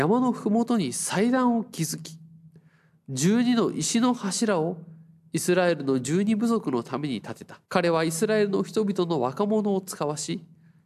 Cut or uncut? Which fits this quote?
cut